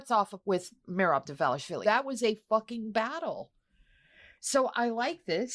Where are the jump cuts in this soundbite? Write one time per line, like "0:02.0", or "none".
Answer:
0:01.8